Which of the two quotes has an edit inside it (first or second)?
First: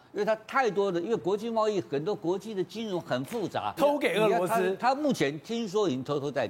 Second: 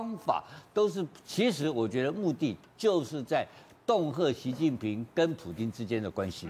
first